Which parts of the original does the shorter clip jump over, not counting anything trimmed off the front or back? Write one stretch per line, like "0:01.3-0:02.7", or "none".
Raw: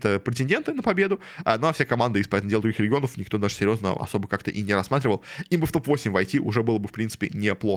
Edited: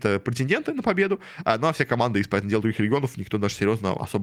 none